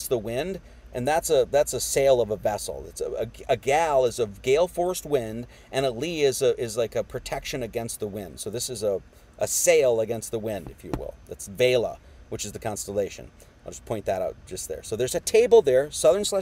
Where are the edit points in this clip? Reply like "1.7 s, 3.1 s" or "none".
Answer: none